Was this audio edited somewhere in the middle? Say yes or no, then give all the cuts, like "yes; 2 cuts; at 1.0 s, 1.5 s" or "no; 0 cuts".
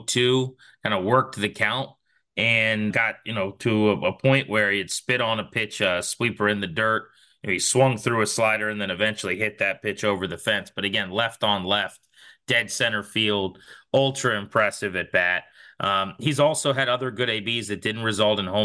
yes; 1 cut; at 2.9 s